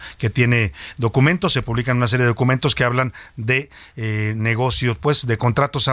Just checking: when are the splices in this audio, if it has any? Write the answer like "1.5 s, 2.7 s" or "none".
none